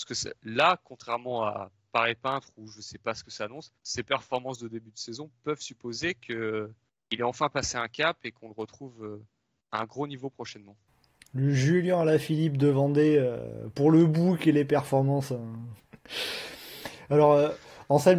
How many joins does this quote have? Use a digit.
2